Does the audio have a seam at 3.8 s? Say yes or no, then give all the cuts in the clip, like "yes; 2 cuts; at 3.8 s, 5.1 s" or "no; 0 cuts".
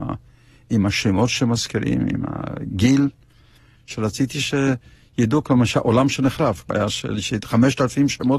yes; 2 cuts; at 3.8 s, 6.6 s